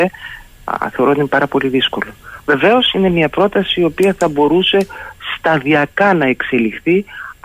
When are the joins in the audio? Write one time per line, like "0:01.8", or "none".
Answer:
none